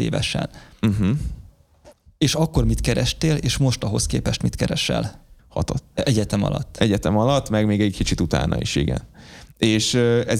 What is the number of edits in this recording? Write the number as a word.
one